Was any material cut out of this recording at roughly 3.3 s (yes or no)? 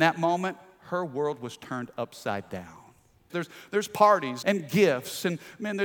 yes